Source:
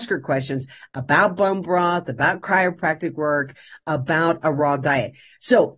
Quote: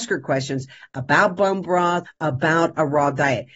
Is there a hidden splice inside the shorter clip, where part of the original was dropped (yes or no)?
yes